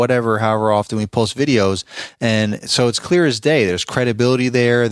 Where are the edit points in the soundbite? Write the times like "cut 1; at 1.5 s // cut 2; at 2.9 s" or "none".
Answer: none